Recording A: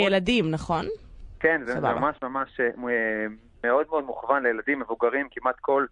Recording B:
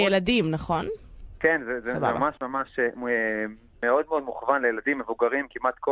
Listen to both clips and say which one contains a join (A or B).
A